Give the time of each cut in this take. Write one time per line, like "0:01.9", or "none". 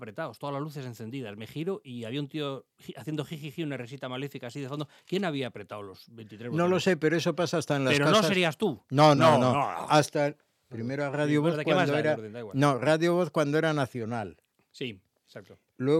0:09.2
0:10.7